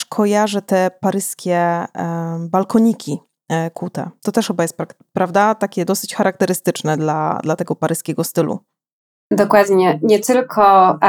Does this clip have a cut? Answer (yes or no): no